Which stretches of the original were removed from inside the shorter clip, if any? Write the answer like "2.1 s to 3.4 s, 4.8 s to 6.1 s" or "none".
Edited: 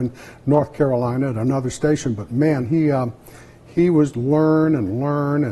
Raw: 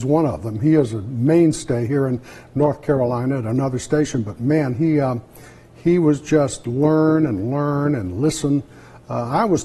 6.2 s to 6.6 s